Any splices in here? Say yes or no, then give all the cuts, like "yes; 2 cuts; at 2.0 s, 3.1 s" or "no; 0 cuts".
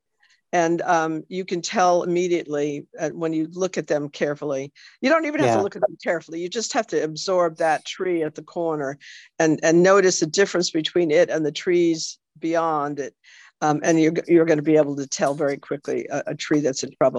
no; 0 cuts